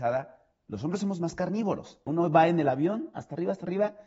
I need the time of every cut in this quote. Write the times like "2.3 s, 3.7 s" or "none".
2.1 s